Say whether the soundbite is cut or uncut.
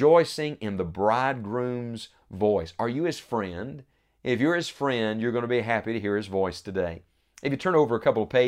uncut